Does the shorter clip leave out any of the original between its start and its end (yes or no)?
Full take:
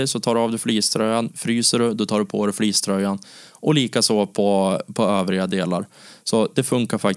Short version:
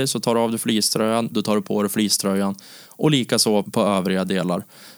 yes